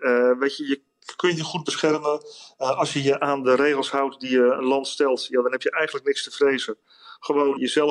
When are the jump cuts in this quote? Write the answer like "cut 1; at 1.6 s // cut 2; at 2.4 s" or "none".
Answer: none